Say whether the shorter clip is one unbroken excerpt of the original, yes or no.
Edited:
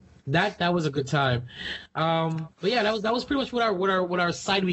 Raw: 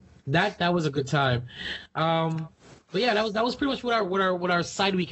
no